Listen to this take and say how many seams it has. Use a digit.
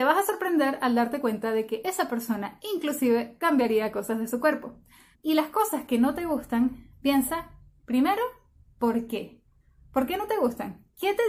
1